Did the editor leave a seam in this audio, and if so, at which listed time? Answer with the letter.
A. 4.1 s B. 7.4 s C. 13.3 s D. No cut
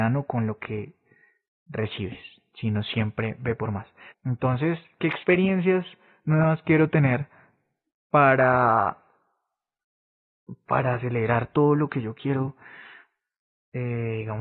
A